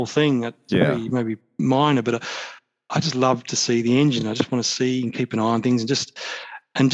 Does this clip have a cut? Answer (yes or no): no